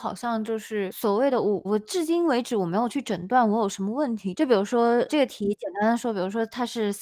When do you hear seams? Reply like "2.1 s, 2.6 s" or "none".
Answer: 1.6 s, 4.3 s